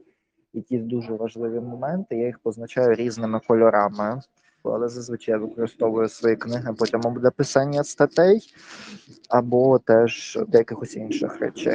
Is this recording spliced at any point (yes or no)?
yes